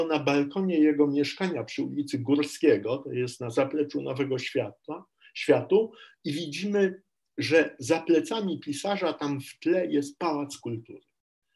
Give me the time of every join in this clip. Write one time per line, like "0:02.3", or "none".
none